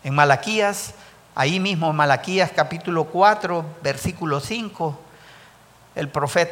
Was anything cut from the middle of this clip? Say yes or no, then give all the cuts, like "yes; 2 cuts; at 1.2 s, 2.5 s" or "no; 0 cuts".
no; 0 cuts